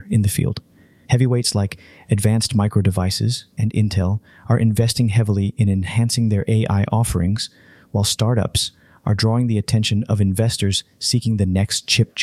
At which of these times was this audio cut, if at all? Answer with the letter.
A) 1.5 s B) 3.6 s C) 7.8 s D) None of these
B